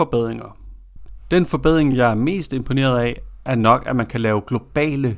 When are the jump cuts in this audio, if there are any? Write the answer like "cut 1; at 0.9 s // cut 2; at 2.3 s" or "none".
none